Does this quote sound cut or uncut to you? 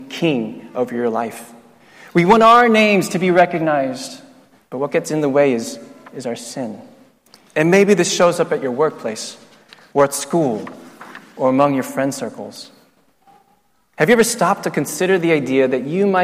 cut